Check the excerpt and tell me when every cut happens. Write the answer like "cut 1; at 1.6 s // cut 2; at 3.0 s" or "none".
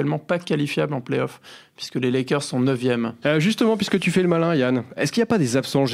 cut 1; at 3.2 s // cut 2; at 5.0 s